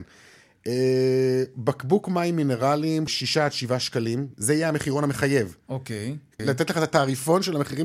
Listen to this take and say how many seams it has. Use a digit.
2